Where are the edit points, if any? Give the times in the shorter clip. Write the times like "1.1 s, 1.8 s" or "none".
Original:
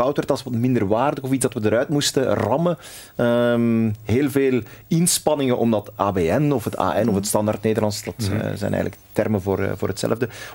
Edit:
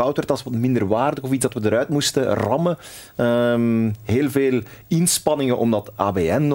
none